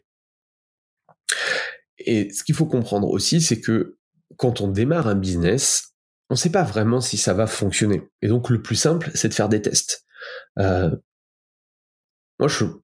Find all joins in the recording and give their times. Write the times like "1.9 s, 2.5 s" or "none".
none